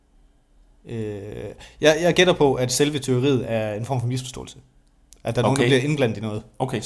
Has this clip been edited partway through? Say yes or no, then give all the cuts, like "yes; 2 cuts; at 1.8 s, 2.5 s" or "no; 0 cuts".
no; 0 cuts